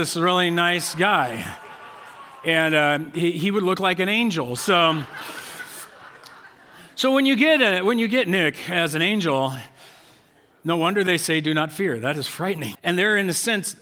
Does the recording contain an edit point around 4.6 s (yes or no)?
yes